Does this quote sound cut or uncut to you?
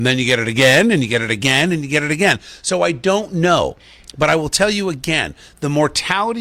uncut